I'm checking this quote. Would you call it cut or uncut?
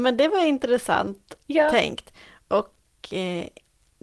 uncut